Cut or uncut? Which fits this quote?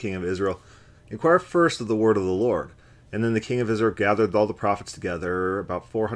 uncut